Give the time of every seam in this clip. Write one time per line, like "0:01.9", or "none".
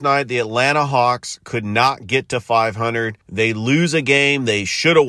0:03.2